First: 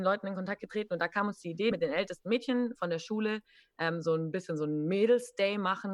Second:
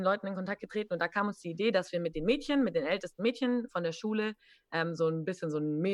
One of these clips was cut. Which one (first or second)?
first